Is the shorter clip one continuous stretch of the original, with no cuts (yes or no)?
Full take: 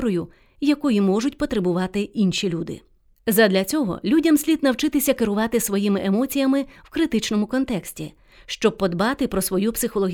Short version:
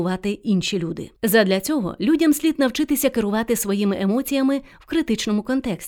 no